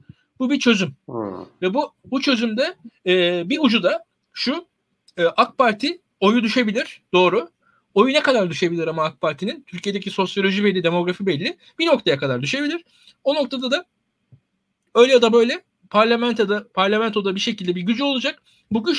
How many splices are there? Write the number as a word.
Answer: zero